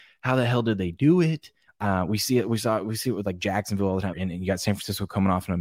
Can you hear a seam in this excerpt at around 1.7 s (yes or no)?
yes